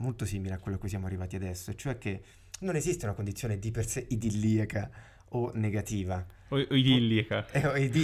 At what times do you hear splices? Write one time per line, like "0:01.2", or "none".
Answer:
none